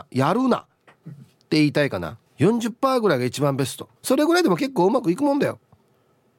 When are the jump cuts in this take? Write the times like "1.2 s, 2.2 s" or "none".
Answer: 2.3 s, 4.0 s